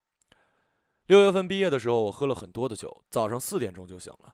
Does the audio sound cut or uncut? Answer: uncut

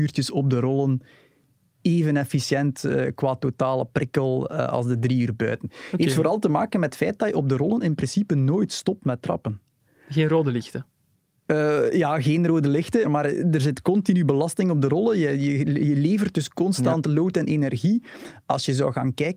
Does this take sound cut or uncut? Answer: cut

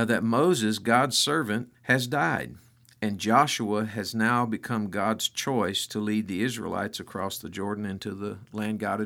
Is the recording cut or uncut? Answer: cut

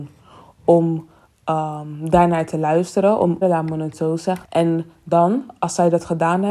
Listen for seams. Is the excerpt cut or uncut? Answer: cut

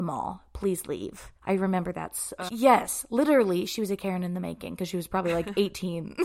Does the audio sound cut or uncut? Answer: cut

